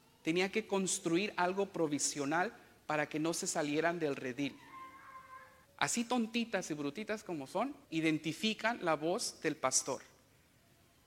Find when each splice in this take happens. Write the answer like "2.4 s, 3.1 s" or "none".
5.6 s, 7.8 s